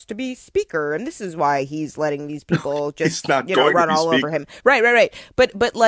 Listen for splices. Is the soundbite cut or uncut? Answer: uncut